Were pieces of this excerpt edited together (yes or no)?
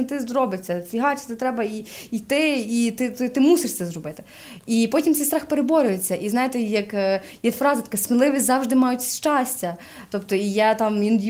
no